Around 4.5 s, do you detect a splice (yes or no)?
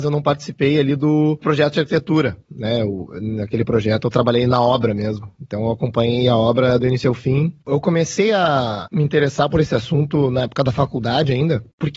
yes